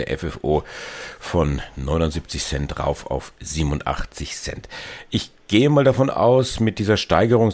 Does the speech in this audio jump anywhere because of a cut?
no; 0 cuts

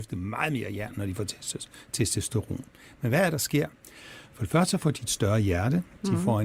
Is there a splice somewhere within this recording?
no; 0 cuts

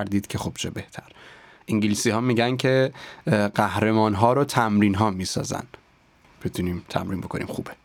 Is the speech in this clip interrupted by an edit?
no; 0 cuts

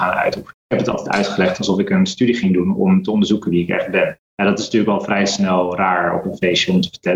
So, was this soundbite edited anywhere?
no; 0 cuts

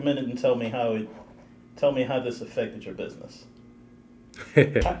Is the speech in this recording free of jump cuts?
yes; 0 cuts

